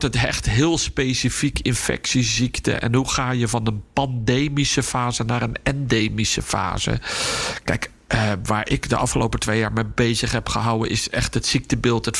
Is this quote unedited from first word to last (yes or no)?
yes